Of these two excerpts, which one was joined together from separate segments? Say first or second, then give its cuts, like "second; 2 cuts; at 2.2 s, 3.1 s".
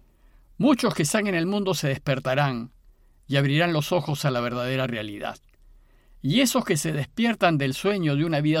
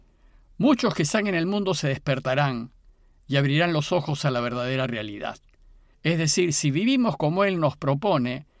second; 1 cut; at 5.9 s